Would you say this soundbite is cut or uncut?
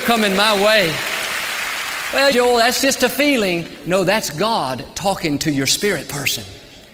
cut